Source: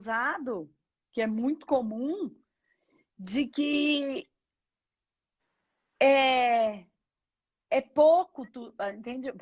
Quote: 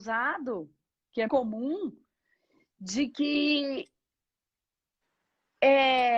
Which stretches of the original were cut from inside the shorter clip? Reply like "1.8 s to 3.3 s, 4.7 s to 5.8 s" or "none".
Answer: 1.3 s to 1.7 s